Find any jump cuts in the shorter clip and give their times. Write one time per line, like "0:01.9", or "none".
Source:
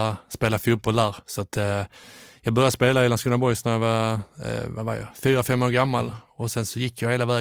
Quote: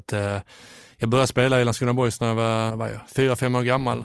0:02.7